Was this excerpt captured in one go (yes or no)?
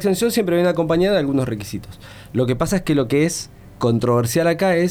no